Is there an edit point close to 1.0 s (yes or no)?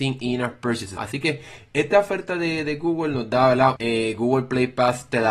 yes